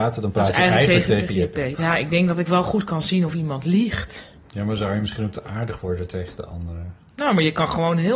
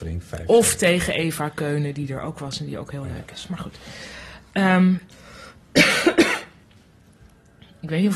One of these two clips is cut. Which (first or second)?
first